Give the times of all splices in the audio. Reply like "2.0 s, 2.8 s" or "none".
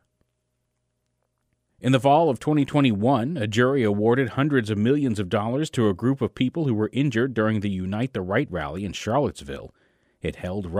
none